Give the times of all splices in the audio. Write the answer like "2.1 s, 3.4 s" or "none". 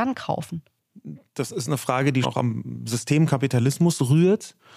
2.2 s